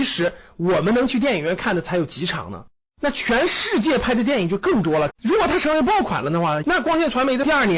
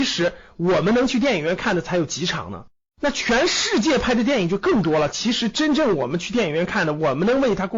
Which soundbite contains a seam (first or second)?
first